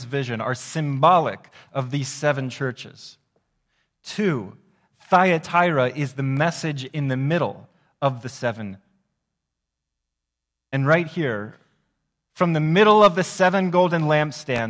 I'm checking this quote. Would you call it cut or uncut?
uncut